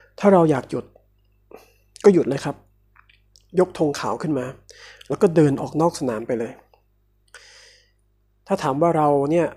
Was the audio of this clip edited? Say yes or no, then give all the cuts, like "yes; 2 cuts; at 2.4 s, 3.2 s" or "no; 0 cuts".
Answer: no; 0 cuts